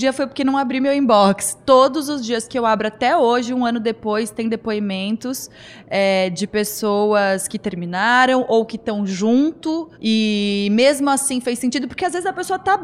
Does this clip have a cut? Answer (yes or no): yes